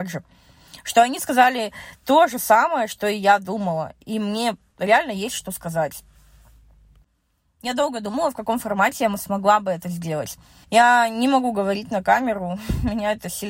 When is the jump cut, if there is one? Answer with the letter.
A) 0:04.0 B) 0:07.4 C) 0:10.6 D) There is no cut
C